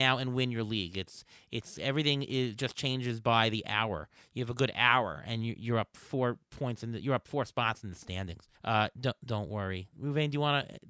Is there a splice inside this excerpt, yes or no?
yes